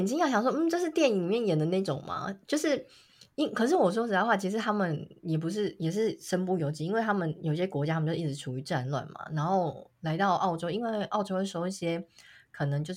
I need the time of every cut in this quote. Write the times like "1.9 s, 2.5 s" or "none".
none